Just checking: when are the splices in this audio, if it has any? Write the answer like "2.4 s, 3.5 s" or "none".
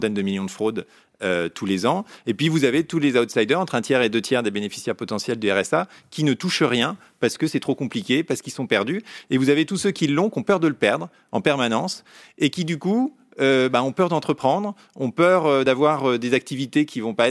none